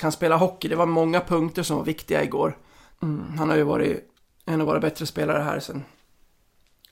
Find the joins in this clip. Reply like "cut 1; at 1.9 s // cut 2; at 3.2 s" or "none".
cut 1; at 2.9 s